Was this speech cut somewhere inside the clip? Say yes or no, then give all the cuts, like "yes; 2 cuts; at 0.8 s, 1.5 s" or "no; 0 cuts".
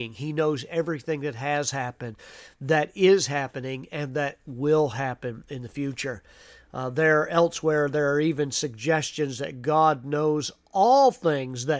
no; 0 cuts